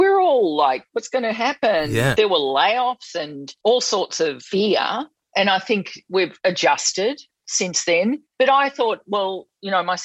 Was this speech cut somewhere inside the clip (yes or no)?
no